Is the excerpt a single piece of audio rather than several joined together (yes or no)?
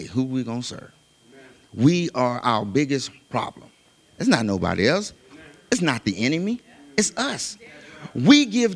yes